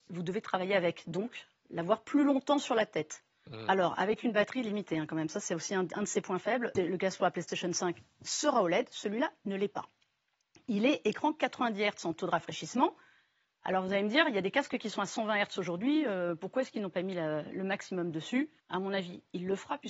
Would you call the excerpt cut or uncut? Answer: cut